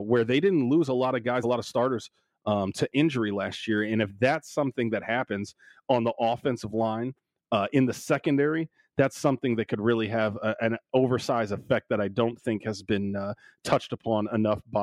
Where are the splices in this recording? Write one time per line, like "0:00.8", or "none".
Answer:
none

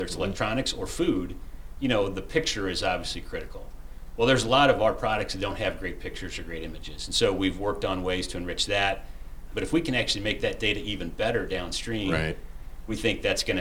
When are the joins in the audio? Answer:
0:09.5

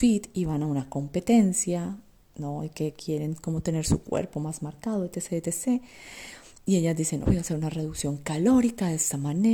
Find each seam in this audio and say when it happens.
0:07.2

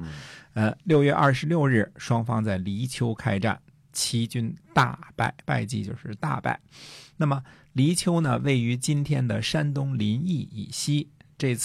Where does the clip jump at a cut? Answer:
0:05.4

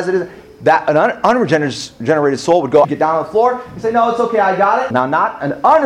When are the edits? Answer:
0:02.8
0:04.9

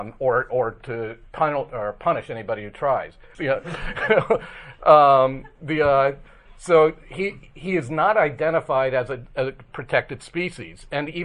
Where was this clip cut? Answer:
0:03.3

